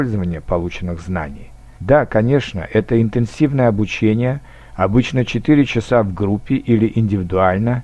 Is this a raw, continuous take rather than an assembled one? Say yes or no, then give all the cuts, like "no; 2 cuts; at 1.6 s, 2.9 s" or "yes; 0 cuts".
no; 1 cut; at 1.8 s